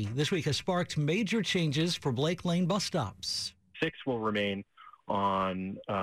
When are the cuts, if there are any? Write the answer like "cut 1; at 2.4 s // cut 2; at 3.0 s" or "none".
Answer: cut 1; at 3.7 s